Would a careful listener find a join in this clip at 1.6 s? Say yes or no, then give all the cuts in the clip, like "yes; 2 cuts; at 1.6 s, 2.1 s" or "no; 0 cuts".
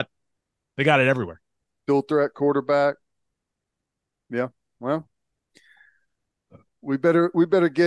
no; 0 cuts